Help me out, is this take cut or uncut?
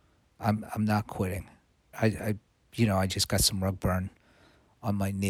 cut